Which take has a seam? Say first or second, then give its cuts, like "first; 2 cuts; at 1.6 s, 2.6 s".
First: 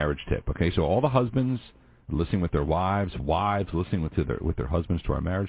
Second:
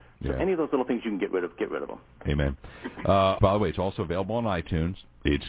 second; 1 cut; at 3.4 s